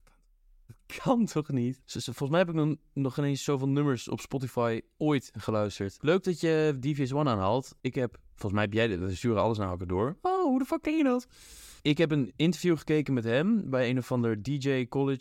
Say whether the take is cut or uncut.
cut